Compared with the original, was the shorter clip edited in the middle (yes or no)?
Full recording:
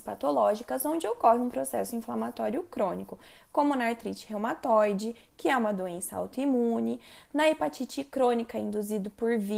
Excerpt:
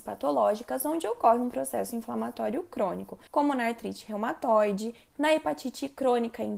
yes